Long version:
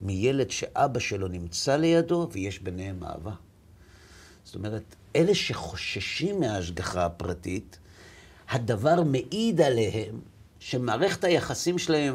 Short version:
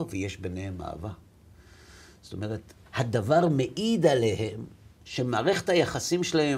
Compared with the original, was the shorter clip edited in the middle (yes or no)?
yes